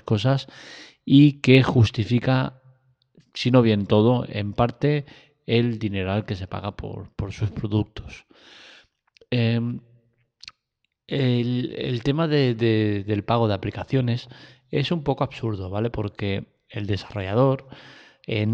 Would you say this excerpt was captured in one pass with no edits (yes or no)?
yes